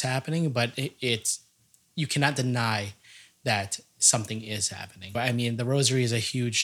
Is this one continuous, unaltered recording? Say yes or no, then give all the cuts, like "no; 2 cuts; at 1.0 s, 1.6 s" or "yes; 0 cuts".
no; 1 cut; at 5.1 s